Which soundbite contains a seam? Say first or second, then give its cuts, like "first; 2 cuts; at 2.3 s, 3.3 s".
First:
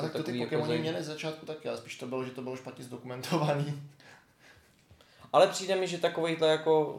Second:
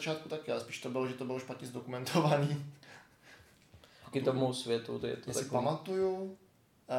second; 1 cut; at 4.1 s